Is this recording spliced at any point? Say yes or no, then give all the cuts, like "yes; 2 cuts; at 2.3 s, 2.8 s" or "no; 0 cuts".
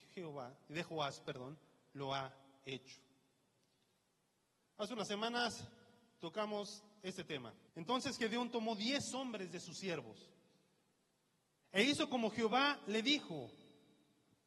yes; 1 cut; at 7.7 s